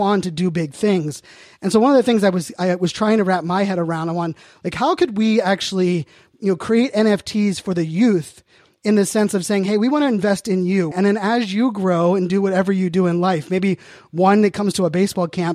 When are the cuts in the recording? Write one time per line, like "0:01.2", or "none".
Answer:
0:10.9